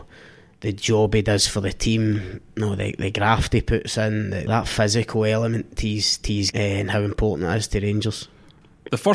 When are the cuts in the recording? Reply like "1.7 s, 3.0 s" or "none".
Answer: 4.5 s, 6.5 s